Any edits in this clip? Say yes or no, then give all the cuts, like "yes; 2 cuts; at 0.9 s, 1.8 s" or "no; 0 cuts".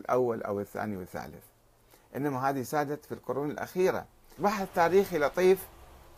yes; 1 cut; at 4.4 s